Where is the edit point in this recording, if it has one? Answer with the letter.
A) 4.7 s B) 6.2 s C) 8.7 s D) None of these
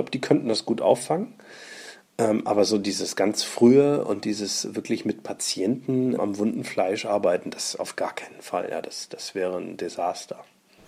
B